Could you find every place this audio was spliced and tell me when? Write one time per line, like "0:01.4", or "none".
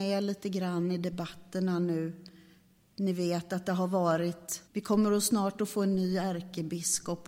0:04.7